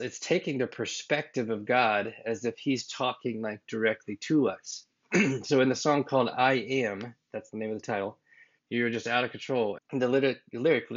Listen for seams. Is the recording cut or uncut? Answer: cut